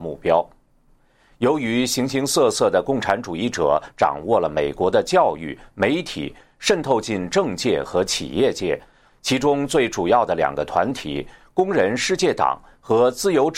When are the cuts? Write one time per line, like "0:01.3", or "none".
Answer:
0:09.1